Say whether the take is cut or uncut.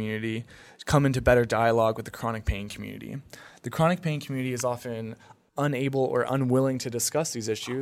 uncut